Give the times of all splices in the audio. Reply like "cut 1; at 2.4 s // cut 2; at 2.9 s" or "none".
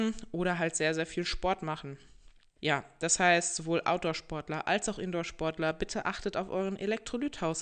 cut 1; at 2.6 s